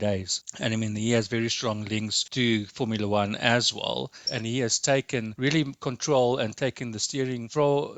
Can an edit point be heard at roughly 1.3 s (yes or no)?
no